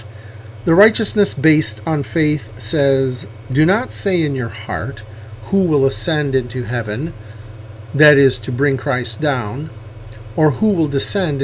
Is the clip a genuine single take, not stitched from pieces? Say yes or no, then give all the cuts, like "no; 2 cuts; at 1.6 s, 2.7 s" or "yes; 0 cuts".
yes; 0 cuts